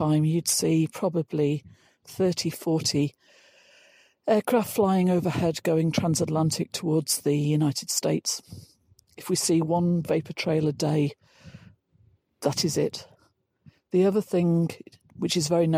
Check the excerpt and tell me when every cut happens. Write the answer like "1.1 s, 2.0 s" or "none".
none